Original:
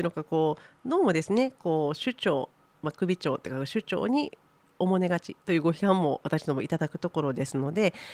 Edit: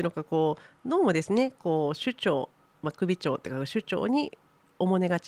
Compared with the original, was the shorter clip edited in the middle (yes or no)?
no